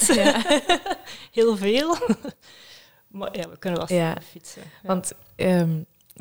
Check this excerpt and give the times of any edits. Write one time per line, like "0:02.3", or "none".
none